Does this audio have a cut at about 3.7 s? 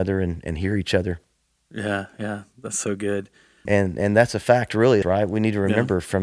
yes; 2 cuts; at 3.7 s, 5.0 s

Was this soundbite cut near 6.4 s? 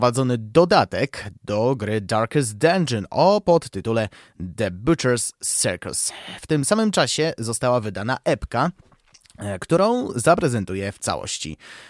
no; 0 cuts

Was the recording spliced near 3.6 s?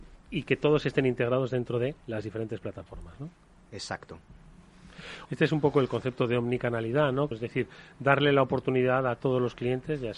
no; 2 cuts; at 5.3 s, 7.3 s

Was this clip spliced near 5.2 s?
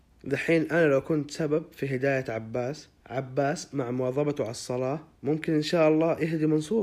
yes; 1 cut; at 5.2 s

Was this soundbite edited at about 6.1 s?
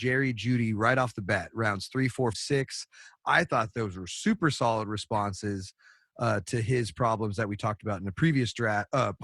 no; 1 cut; at 2.3 s

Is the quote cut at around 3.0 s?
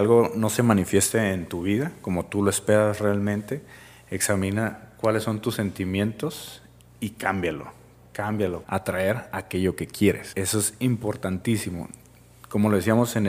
no; 2 cuts; at 8.6 s, 10.3 s

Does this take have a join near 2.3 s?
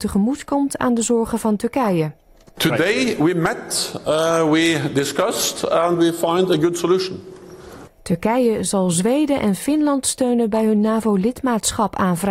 no; 1 cut; at 7.9 s

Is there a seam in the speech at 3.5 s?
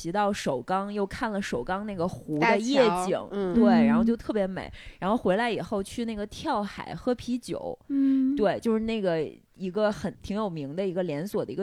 no; 1 cut; at 10.1 s

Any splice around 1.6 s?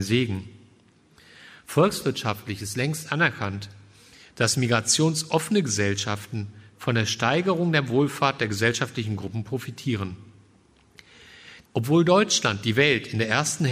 no; 1 cut; at 11.7 s

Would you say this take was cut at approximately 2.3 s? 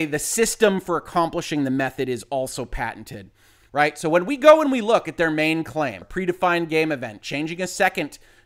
no; 2 cuts; at 3.7 s, 6.0 s

